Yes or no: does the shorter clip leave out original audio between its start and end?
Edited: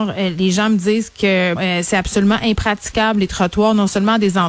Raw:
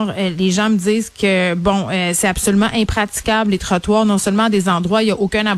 yes